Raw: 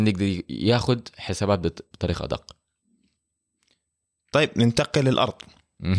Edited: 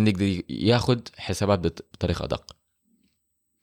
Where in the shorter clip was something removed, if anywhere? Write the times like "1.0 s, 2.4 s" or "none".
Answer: none